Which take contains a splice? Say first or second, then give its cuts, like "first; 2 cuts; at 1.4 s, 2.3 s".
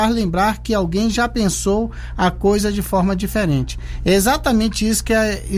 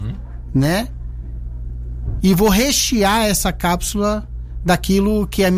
second; 1 cut; at 2.2 s